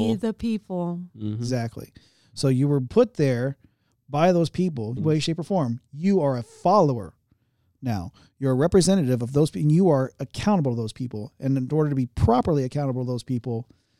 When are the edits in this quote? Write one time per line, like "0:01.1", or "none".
0:05.0